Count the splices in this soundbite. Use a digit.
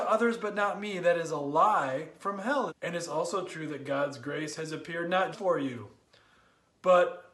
2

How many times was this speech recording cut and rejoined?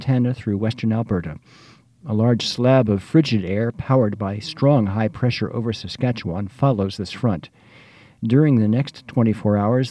0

